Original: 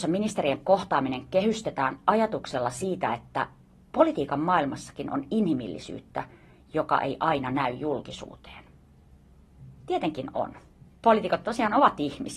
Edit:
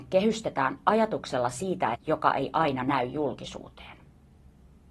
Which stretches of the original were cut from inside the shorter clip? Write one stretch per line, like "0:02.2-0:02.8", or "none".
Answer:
0:03.1-0:06.6